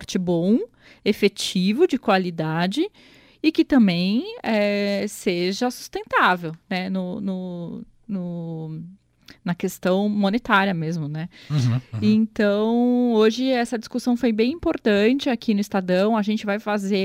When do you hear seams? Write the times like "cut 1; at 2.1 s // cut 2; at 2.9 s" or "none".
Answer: none